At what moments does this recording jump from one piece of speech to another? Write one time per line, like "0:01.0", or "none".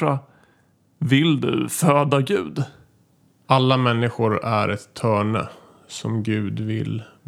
none